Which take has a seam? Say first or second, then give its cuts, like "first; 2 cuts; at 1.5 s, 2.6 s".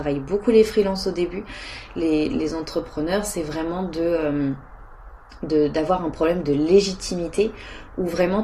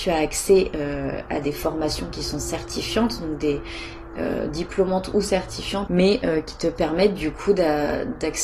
second; 1 cut; at 5.9 s